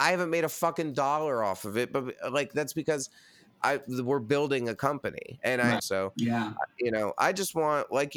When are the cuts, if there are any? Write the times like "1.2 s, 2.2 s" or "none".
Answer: 5.8 s